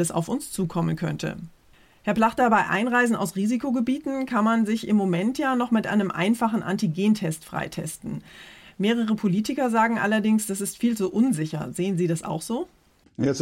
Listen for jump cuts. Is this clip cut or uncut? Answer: uncut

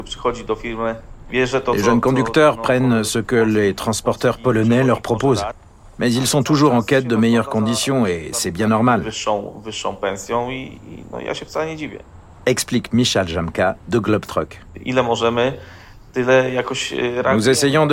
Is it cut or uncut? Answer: uncut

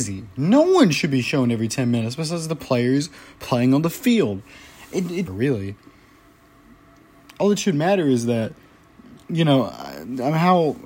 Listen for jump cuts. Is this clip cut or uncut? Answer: cut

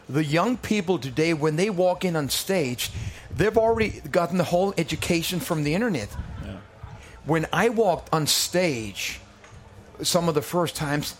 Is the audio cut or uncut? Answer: uncut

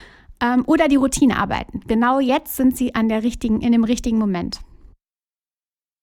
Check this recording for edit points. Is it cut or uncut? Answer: uncut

